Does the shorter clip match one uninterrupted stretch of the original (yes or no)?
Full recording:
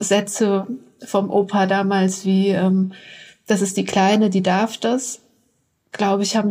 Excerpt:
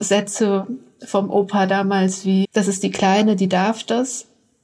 no